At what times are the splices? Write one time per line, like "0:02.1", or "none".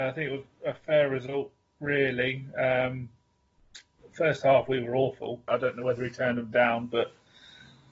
0:05.5